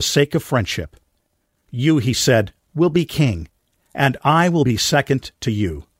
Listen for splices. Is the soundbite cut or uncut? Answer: uncut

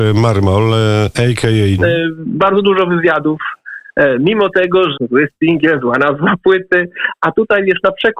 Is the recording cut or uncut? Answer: cut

